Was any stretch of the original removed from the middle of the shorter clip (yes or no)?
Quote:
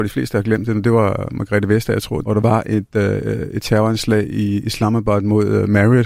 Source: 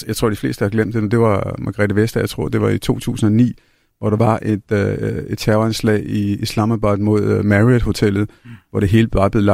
yes